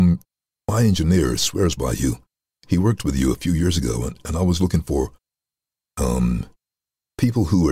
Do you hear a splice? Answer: no; 0 cuts

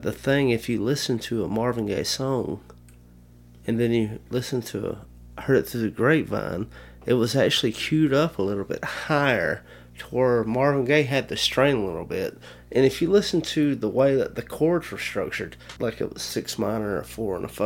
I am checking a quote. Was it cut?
yes; 1 cut; at 15.8 s

